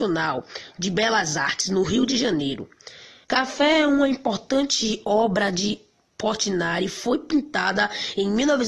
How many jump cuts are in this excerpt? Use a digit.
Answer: 1